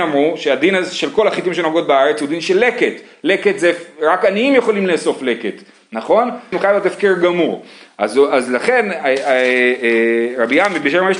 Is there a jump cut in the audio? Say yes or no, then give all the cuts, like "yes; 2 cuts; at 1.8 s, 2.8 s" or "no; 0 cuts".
yes; 1 cut; at 6.5 s